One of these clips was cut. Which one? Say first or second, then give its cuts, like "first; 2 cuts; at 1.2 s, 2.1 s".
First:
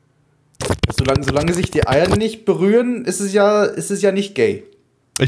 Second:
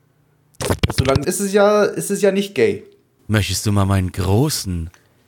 second; 2 cuts; at 1.2 s, 3.2 s